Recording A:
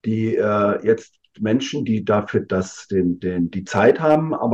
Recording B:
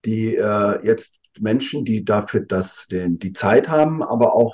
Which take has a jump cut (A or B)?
B